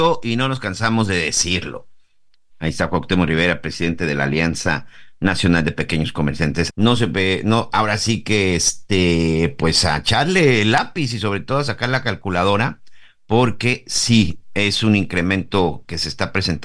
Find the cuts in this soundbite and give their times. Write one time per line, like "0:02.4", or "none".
0:02.5
0:06.7